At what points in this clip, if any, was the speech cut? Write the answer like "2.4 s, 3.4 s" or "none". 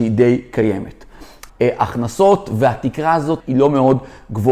1.5 s, 3.4 s